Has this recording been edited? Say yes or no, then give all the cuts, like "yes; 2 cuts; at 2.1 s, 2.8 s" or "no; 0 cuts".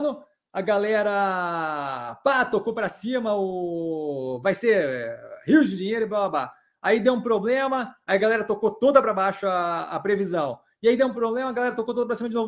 no; 0 cuts